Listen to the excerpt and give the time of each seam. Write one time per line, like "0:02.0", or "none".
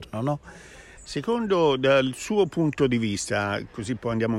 0:00.9